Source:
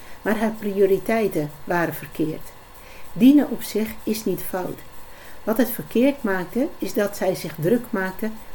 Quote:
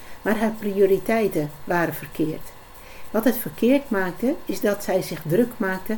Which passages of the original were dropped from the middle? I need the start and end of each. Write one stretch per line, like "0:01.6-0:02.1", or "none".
0:03.1-0:05.4